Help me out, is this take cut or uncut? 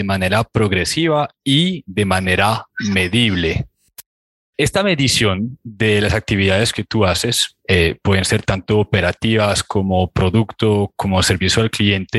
uncut